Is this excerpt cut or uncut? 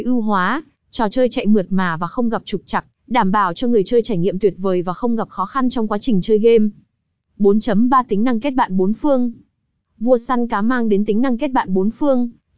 uncut